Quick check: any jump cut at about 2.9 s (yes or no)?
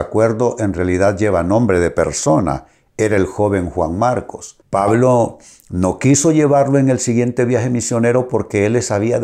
no